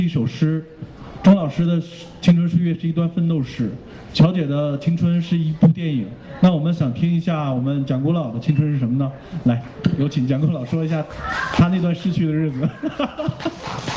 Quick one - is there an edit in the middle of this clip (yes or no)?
no